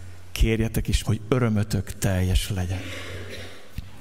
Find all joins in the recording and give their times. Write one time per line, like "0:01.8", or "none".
0:01.0